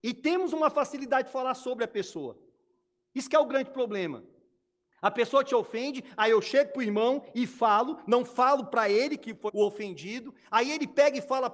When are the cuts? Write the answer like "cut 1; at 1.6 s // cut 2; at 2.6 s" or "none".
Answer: cut 1; at 9.5 s